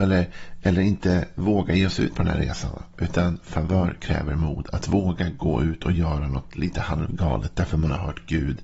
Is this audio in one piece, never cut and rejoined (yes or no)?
yes